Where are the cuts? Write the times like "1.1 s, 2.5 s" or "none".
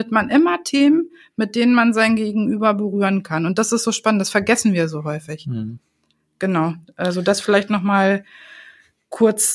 none